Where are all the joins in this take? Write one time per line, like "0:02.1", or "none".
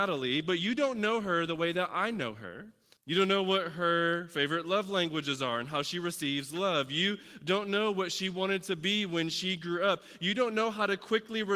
0:03.0